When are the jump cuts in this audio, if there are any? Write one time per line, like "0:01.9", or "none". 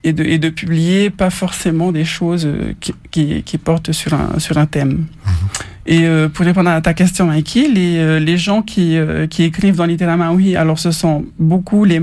none